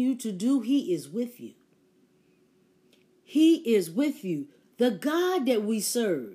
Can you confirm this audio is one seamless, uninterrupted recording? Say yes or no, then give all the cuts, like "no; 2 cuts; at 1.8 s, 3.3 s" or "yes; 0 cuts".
yes; 0 cuts